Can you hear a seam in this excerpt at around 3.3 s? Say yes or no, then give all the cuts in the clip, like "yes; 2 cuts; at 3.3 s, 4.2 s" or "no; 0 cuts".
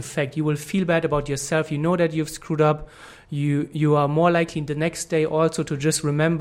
no; 0 cuts